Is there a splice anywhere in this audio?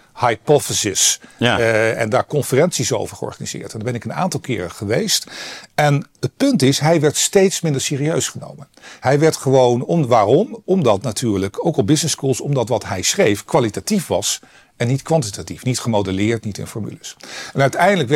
yes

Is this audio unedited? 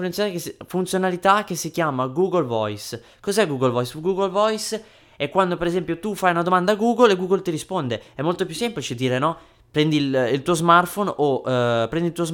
yes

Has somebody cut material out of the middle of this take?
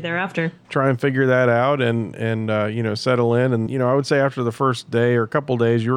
yes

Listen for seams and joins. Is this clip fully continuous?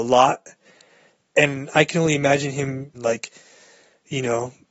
no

